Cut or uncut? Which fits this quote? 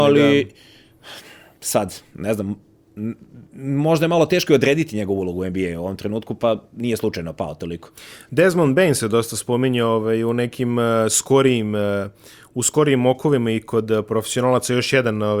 uncut